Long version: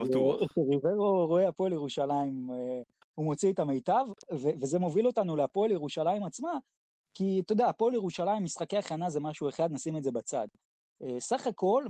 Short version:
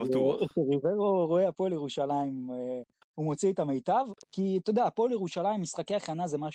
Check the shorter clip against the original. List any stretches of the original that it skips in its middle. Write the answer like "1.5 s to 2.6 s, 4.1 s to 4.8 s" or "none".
4.2 s to 7.1 s